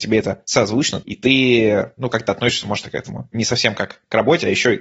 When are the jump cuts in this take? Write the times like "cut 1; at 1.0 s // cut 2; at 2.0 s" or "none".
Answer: cut 1; at 1.0 s